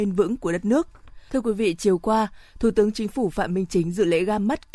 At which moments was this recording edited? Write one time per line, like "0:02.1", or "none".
0:01.3